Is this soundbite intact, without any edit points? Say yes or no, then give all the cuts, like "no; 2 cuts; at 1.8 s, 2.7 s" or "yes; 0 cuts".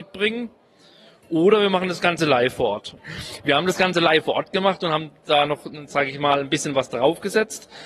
no; 1 cut; at 3.0 s